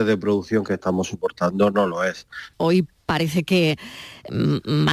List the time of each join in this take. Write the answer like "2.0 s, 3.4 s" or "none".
2.5 s